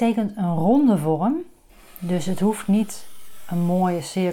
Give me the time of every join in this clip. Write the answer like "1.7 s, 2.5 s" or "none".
none

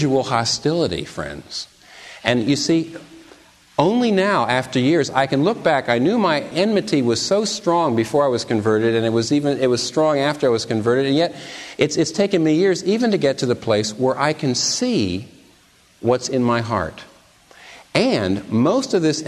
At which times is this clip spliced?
none

